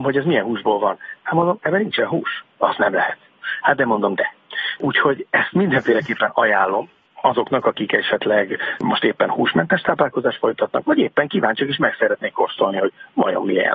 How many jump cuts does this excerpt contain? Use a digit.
0